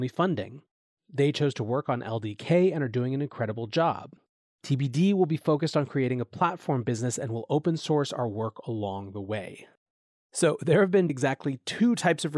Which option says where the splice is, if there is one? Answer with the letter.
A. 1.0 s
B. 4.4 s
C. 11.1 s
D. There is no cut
C